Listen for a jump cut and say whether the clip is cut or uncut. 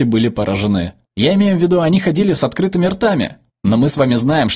uncut